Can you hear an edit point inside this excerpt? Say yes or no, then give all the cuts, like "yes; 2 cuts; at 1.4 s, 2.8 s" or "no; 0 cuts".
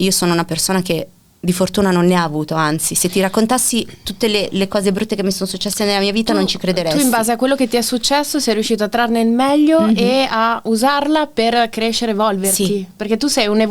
no; 0 cuts